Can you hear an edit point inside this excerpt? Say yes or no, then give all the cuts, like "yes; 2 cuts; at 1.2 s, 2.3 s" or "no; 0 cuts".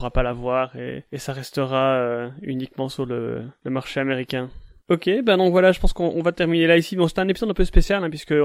no; 0 cuts